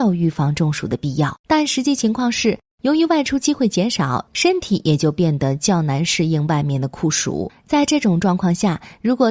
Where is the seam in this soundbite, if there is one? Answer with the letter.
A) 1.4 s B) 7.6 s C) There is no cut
A